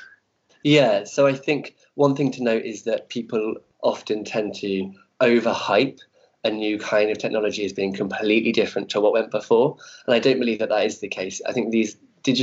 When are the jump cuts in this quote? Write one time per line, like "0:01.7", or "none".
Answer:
none